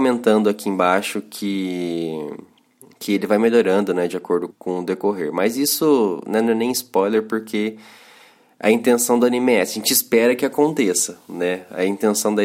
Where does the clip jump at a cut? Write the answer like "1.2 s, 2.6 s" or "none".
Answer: 4.5 s